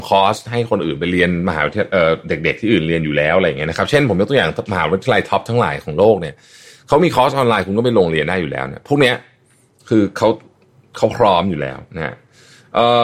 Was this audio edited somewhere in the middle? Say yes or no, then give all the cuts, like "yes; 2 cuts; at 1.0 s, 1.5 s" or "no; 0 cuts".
no; 0 cuts